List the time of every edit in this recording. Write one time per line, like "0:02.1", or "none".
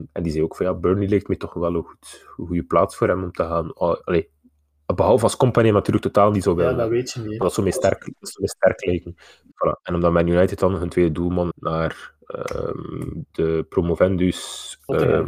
0:09.5
0:11.5